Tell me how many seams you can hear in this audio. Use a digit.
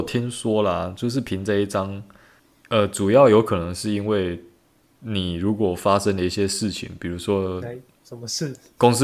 0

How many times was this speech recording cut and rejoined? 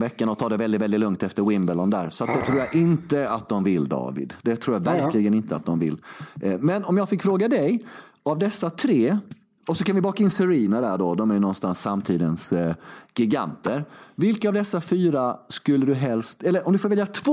0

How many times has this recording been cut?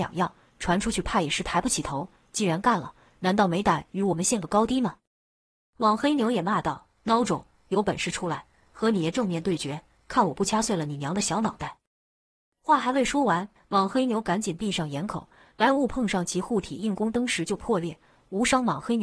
1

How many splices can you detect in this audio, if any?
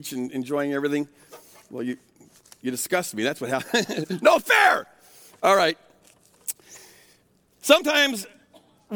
0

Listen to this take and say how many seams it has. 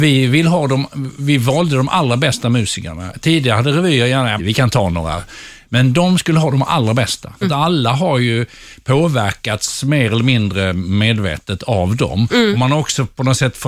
2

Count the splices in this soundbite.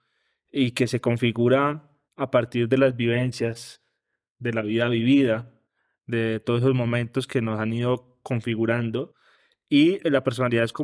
1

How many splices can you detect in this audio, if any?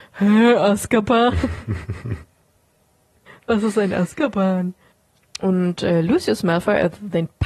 0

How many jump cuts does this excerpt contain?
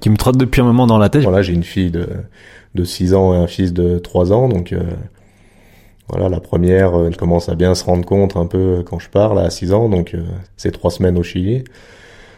3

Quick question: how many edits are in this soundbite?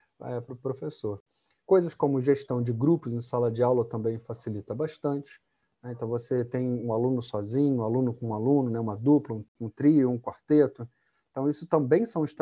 0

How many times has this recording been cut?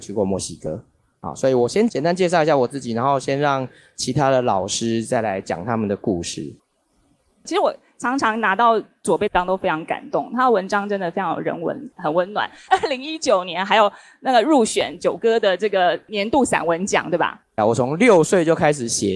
2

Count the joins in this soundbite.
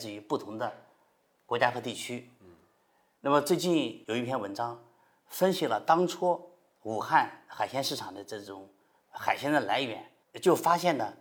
0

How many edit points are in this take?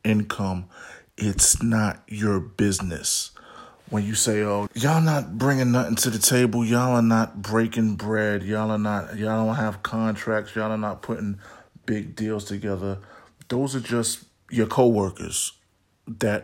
1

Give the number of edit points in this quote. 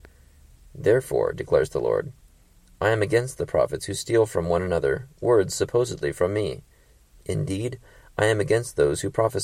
1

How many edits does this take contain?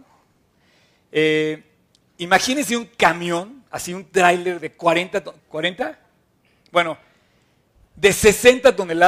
1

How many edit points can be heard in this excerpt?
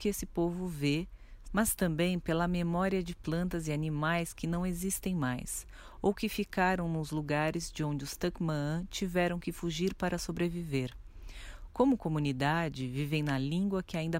1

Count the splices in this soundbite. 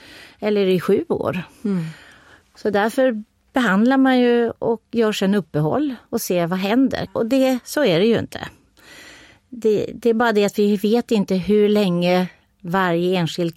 1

